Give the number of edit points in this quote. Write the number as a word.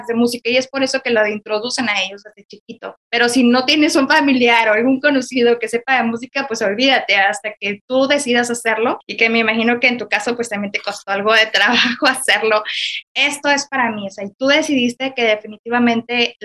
two